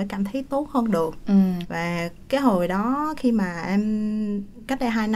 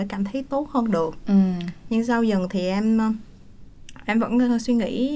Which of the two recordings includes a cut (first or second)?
first